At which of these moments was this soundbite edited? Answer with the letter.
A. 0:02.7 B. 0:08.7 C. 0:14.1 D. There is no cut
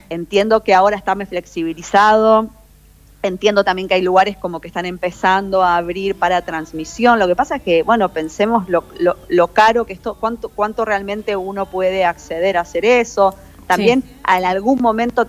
D